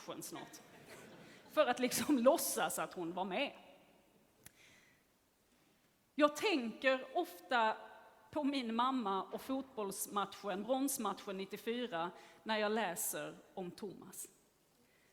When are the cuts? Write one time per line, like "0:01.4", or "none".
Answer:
none